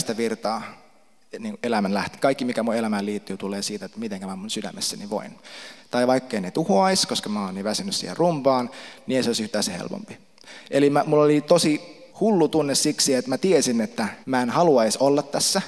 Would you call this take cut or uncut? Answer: cut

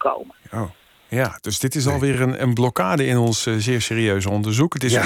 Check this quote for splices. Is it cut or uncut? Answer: uncut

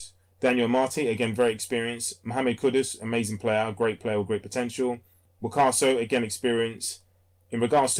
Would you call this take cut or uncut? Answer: uncut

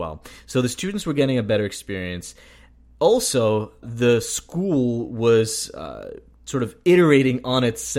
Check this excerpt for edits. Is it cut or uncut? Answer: cut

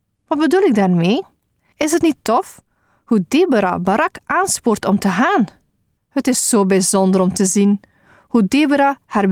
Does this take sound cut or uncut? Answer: cut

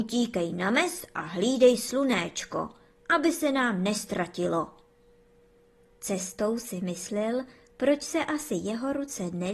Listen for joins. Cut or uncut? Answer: cut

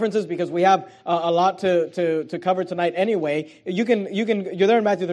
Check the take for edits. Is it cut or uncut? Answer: uncut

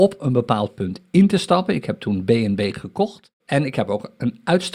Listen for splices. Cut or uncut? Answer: cut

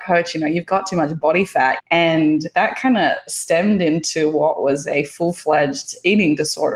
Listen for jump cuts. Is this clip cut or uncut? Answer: cut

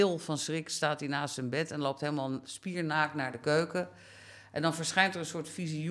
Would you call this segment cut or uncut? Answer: uncut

